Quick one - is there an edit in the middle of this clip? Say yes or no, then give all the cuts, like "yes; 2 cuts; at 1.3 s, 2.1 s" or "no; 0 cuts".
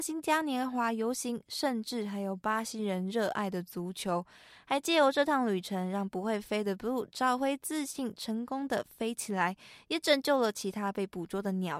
no; 0 cuts